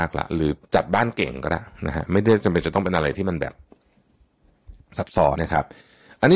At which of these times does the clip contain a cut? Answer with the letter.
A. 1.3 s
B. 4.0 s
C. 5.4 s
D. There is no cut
C